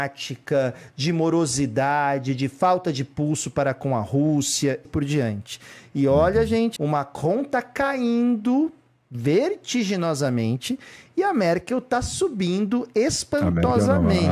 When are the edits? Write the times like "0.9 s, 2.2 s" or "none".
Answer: 4.9 s, 6.8 s